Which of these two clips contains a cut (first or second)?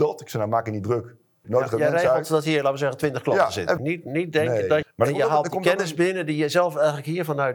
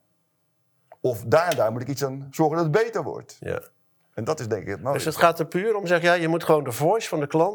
first